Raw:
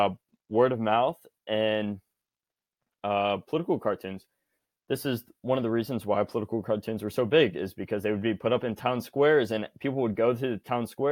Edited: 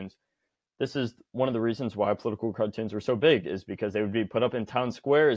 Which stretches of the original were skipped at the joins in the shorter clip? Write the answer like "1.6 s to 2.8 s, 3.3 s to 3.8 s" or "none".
none